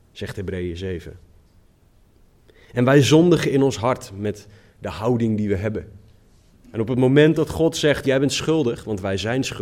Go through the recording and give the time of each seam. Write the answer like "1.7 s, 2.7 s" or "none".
6.5 s